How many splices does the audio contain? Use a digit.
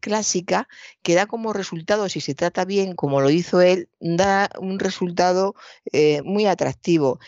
2